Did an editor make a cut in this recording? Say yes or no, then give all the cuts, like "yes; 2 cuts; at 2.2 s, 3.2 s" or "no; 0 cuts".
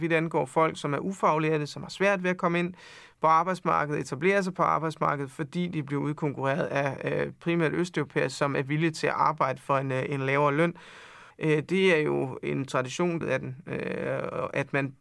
yes; 2 cuts; at 11.3 s, 13.2 s